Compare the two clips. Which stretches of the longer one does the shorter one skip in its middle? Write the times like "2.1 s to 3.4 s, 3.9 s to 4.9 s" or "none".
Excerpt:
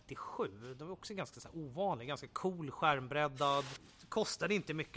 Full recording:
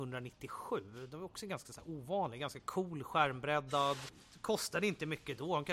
none